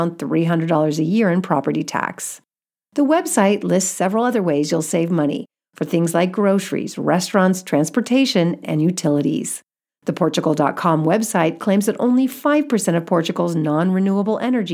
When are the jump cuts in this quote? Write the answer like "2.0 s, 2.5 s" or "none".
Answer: 8.6 s, 9.9 s

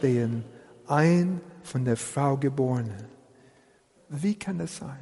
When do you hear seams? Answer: 4.0 s

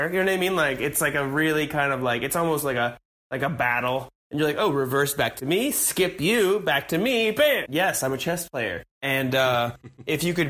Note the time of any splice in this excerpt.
7.7 s, 8.9 s

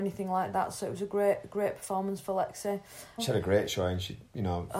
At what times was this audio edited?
3.2 s

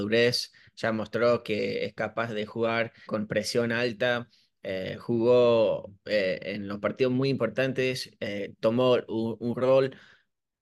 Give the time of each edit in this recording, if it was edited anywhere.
3.1 s

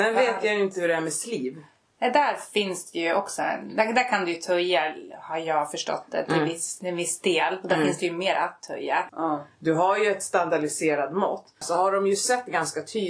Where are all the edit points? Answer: 9.1 s, 11.6 s

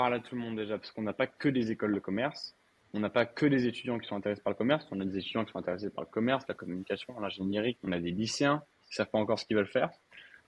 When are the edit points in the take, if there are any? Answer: 7.8 s

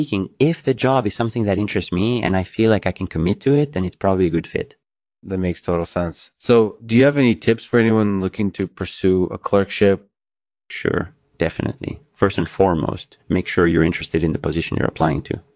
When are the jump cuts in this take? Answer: none

